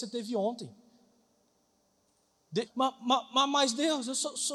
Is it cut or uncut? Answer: cut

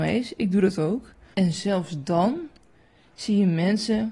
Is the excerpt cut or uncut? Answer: cut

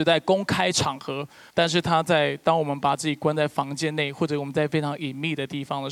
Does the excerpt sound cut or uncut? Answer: cut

